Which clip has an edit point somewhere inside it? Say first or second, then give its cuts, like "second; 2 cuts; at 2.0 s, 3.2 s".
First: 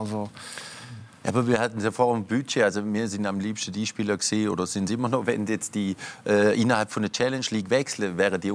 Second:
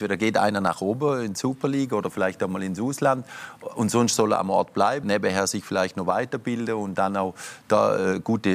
second; 1 cut; at 5.0 s